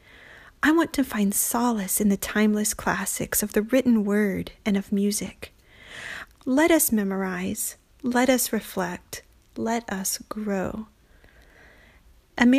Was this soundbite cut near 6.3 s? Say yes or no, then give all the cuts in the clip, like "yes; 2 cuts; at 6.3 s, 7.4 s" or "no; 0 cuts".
yes; 1 cut; at 6.3 s